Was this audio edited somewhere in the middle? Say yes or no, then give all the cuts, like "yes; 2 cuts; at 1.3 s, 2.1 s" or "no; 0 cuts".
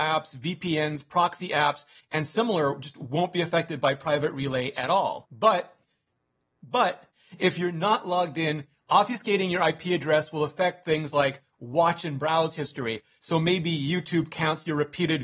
no; 0 cuts